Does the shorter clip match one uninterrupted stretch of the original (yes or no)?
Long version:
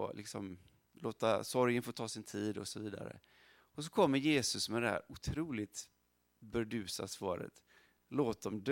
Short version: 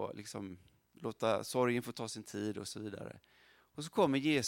yes